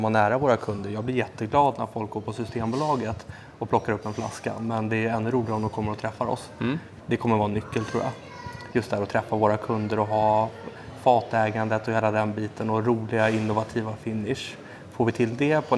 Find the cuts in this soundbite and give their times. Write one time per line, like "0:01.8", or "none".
0:07.0
0:08.7